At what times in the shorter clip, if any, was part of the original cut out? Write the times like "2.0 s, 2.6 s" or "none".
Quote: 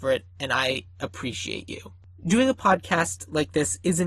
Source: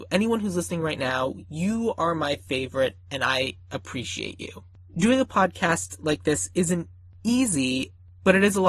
none